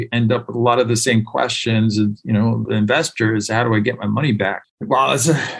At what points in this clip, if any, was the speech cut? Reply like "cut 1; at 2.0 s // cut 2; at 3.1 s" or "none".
cut 1; at 2.7 s // cut 2; at 4.6 s